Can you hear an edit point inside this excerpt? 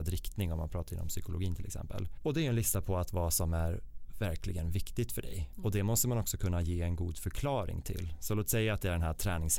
no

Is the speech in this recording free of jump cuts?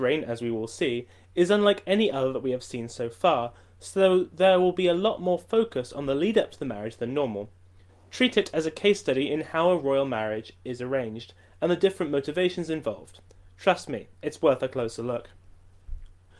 yes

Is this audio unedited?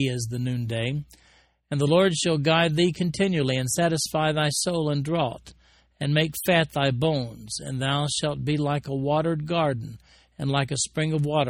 yes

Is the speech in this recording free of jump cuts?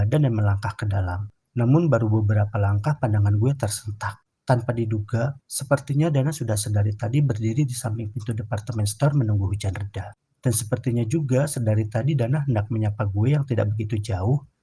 no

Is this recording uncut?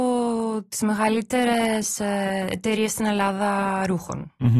yes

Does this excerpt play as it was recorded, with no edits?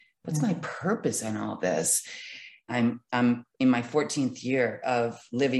no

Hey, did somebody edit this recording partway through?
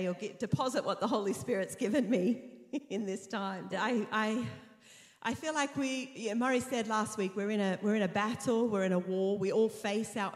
yes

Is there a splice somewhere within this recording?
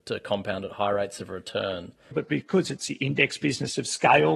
yes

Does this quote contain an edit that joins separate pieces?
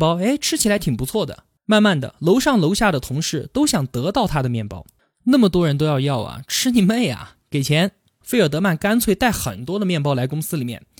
no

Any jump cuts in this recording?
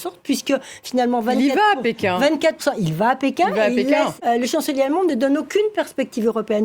yes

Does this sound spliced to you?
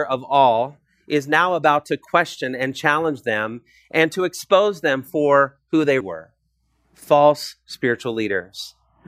yes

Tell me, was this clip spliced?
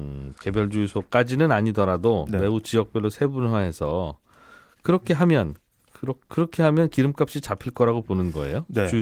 no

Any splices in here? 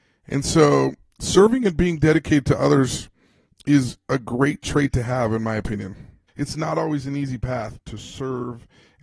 yes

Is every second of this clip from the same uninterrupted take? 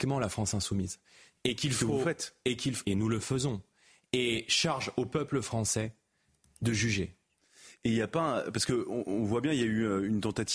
no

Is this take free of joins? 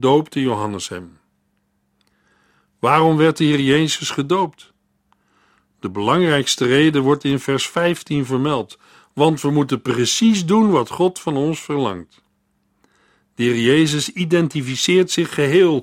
yes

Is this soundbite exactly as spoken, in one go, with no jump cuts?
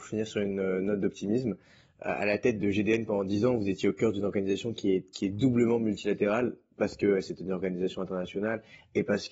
no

